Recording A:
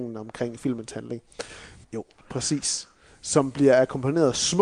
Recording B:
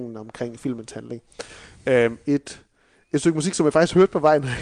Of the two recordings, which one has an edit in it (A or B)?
A